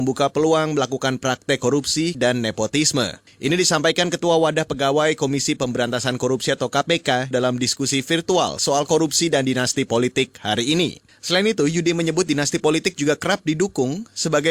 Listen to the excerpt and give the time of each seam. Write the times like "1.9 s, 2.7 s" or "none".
2.1 s, 7.3 s, 11.1 s